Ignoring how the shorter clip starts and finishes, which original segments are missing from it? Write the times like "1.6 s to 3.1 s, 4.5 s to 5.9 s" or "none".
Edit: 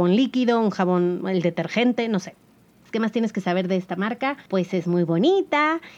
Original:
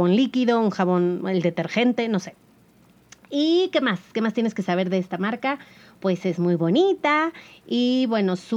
2.9 s to 4.1 s, 5.7 s to 6.0 s